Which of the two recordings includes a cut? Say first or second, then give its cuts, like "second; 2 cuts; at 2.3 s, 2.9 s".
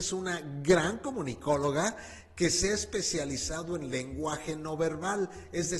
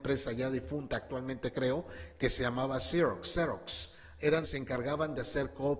second; 1 cut; at 4.4 s